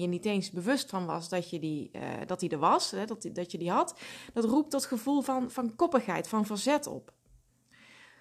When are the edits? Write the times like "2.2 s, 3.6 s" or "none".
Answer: none